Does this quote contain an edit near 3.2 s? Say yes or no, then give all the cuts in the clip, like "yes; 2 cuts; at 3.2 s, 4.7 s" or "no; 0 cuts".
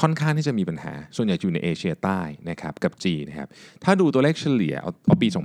yes; 1 cut; at 3.2 s